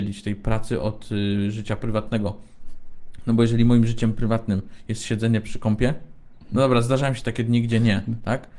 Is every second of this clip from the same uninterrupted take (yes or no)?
yes